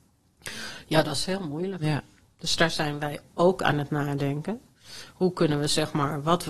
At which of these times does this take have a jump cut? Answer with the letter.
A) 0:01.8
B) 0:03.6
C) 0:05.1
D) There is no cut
D